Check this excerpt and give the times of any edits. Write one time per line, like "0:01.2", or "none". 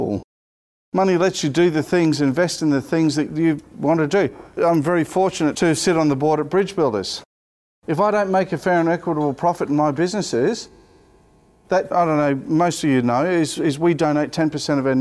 none